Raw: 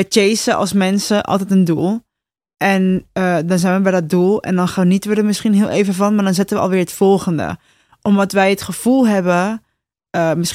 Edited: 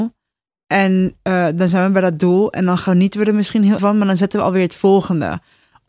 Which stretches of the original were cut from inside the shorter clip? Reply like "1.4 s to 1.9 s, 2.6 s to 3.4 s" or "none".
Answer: 5.7 s to 6.0 s

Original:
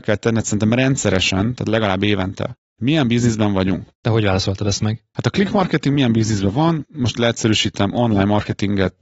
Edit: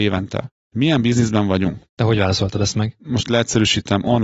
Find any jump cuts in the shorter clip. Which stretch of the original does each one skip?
5.1 s to 6.9 s

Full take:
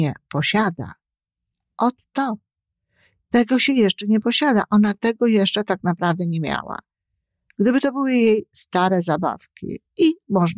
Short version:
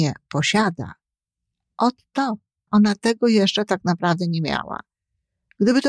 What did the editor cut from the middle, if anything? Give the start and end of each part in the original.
2.7 s to 4.7 s

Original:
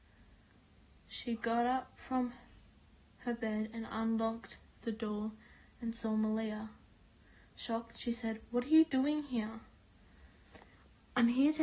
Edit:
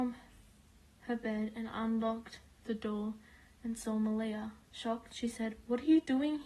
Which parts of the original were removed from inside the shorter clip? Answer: 6.8 s to 7.5 s

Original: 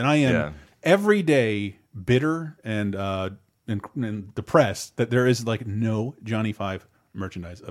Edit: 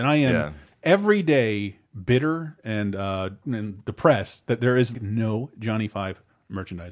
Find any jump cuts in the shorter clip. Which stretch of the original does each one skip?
3.4 s to 3.9 s, 5.4 s to 5.6 s

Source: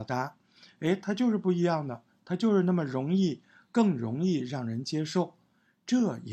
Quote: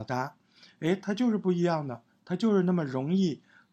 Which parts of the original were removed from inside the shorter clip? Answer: none

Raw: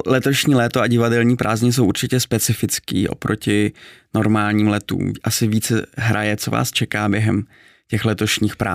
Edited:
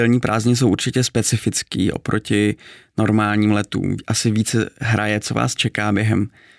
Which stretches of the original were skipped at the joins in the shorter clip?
none

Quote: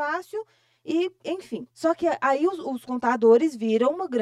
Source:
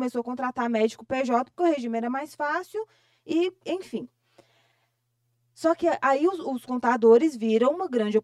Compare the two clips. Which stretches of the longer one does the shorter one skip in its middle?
4.1 s to 5.5 s

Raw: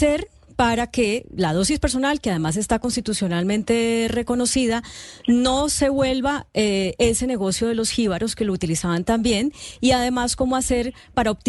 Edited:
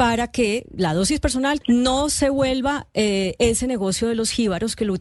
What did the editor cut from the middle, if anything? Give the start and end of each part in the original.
2.2 s to 5.2 s

